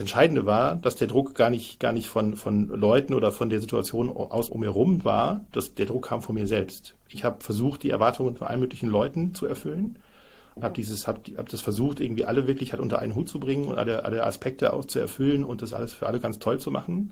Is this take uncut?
no; 1 cut; at 4.5 s

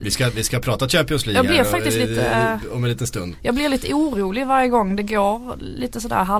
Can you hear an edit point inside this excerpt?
no; 0 cuts

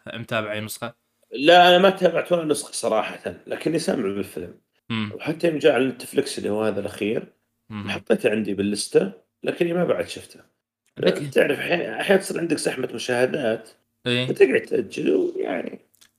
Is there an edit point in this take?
yes; 1 cut; at 14.6 s

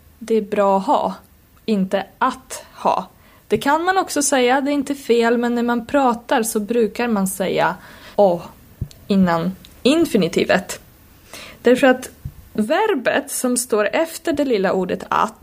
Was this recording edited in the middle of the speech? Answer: yes; 1 cut; at 8.1 s

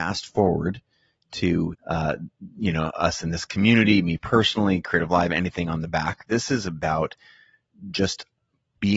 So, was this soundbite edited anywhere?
yes; 1 cut; at 1.7 s

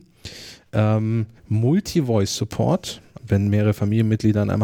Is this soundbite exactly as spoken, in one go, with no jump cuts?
no; 2 cuts; at 1.4 s, 3.2 s

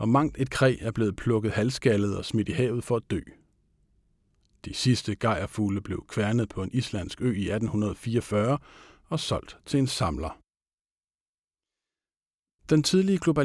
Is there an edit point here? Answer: no; 0 cuts

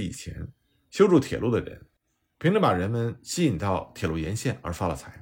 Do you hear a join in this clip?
no; 0 cuts

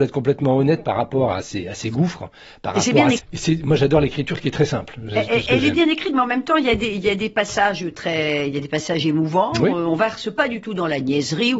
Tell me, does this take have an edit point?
yes; 1 cut; at 3.2 s

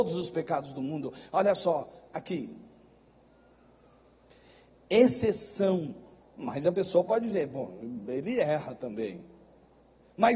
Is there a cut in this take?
yes; 1 cut; at 6.2 s

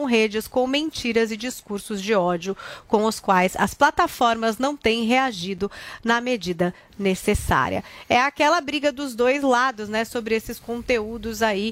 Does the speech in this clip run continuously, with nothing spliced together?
yes; 0 cuts

